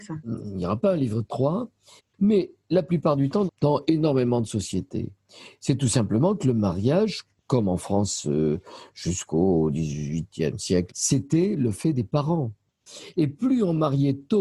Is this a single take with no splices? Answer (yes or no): no